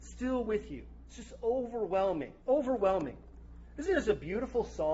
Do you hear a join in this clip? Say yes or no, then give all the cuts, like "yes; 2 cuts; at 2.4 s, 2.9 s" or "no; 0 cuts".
yes; 1 cut; at 2.4 s